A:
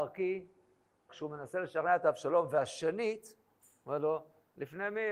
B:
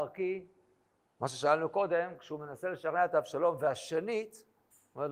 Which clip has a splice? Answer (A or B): A